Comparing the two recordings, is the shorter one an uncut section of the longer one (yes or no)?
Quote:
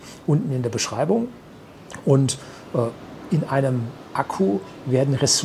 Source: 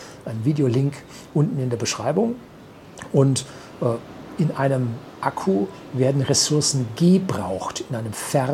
yes